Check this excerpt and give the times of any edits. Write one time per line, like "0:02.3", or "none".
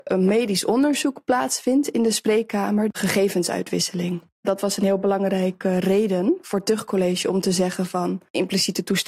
0:02.9